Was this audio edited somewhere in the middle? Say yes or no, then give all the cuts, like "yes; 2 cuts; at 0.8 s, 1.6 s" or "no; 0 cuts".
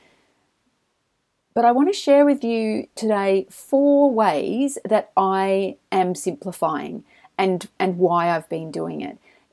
no; 0 cuts